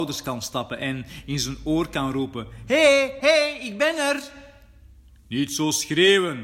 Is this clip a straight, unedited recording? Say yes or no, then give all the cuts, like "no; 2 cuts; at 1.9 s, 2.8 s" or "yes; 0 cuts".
no; 1 cut; at 3.2 s